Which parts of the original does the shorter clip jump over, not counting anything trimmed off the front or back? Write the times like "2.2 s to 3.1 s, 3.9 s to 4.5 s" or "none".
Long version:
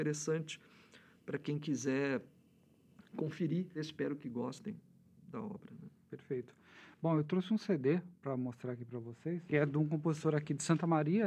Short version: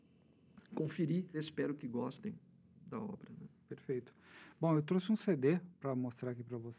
none